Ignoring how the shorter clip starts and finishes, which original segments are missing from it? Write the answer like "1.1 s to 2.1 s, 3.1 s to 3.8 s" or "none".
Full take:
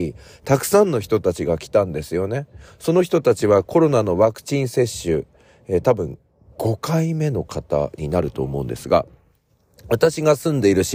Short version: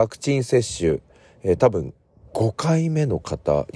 none